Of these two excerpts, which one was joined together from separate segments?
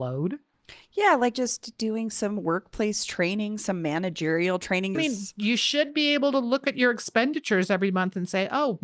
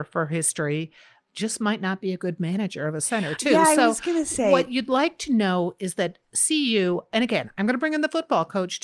first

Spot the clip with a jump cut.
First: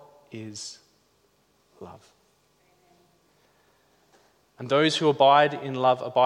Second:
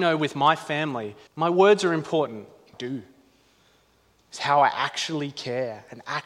second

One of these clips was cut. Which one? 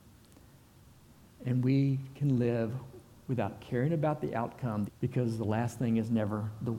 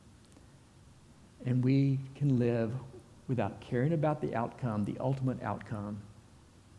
first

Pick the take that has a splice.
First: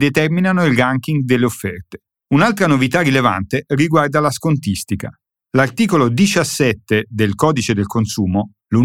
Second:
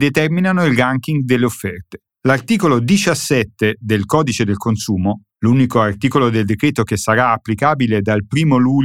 second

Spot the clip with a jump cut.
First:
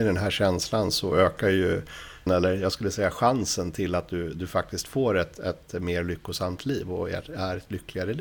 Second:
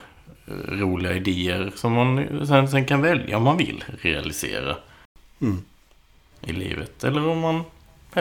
first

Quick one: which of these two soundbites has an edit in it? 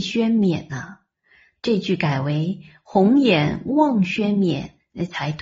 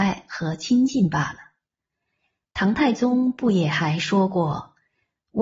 first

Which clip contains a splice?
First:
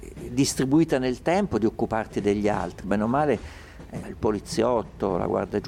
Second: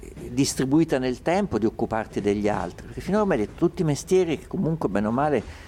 first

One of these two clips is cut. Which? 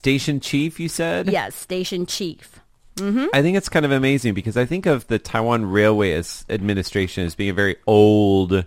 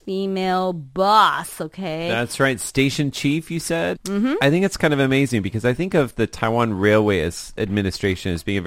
second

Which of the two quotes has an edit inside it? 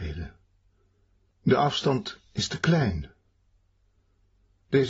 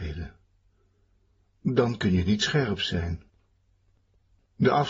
first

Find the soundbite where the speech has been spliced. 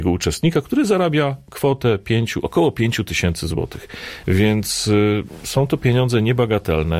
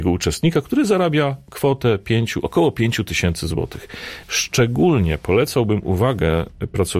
second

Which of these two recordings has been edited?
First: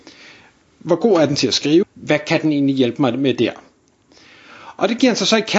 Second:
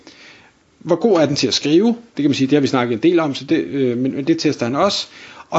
first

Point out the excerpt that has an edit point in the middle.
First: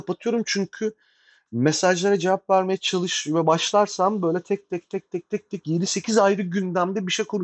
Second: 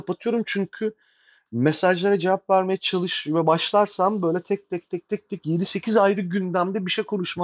second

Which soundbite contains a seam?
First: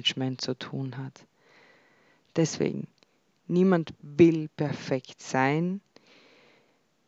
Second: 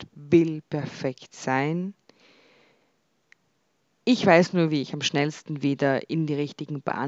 first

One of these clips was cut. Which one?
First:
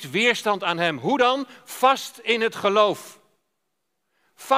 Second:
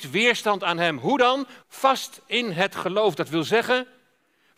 second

